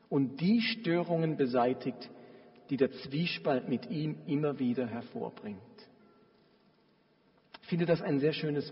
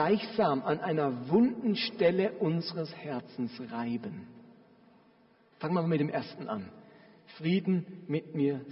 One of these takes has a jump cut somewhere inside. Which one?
second; 1 cut; at 5.5 s

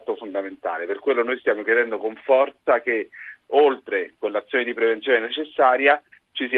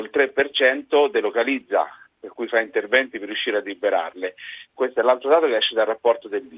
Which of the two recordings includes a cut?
second; 1 cut; at 4.6 s

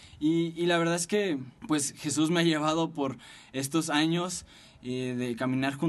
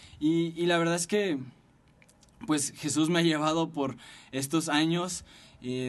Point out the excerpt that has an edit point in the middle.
first; 1 cut; at 1.6 s

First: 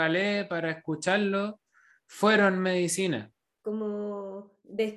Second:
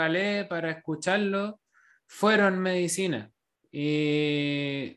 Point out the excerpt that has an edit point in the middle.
first; 1 cut; at 3.5 s

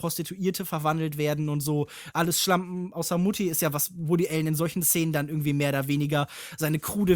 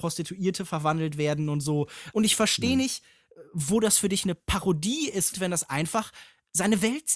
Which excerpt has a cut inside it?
second; 2 cuts; at 2.1 s, 5.3 s

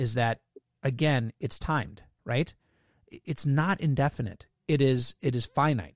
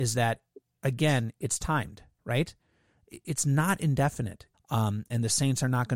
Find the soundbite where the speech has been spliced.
second; 1 cut; at 4.5 s

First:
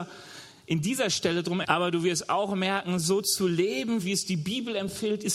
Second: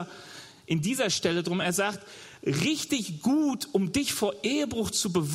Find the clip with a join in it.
first; 2 cuts; at 1.6 s, 4.0 s

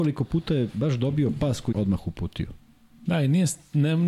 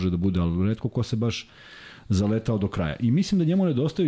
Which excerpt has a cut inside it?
first; 2 cuts; at 1.7 s, 3.1 s

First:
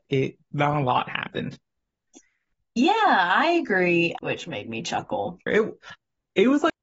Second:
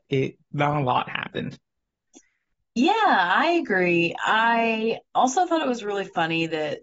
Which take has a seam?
first; 2 cuts; at 4.2 s, 5.5 s

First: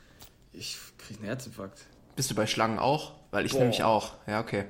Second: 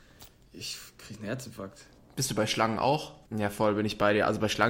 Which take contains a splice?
second; 1 cut; at 3.3 s

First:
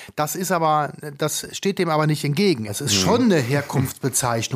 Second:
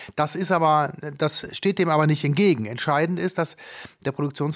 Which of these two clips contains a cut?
first; 1 cut; at 2.7 s

